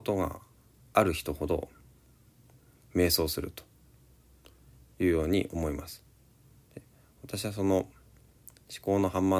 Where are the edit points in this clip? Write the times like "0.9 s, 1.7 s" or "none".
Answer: none